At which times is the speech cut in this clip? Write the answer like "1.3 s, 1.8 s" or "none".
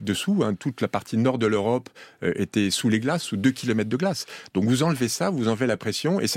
none